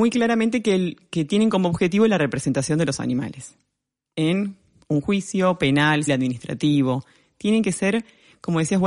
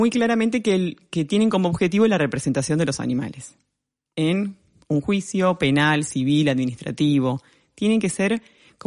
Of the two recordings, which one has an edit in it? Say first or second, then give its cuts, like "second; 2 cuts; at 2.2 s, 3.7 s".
first; 1 cut; at 6.1 s